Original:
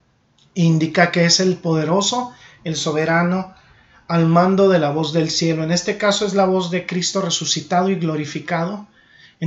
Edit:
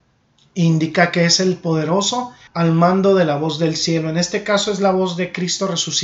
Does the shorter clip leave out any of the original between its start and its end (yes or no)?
yes